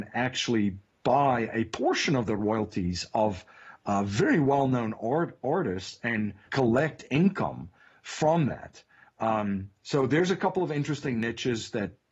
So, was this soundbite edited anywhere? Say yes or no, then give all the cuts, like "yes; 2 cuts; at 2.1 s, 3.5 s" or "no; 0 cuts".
yes; 1 cut; at 6.5 s